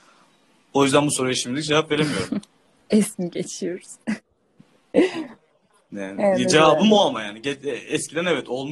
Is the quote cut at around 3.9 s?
no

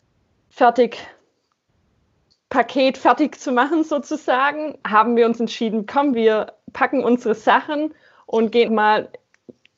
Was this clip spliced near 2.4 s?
no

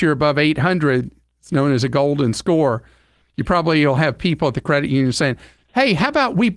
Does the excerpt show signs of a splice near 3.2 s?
no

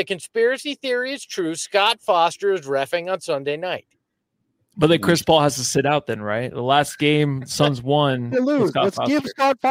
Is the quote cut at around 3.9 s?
no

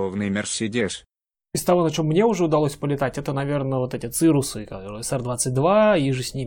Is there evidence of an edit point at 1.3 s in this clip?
yes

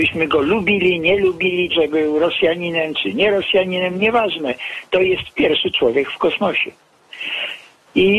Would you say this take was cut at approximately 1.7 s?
yes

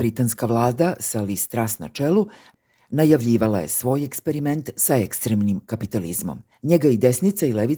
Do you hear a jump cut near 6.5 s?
yes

